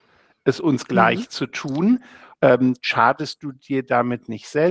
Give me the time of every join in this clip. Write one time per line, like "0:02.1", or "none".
0:02.3